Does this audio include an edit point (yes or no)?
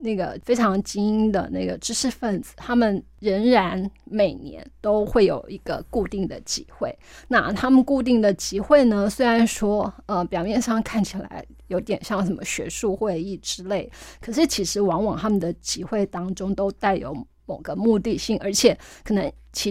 no